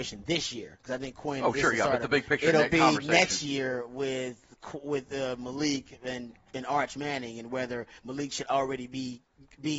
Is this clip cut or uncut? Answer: uncut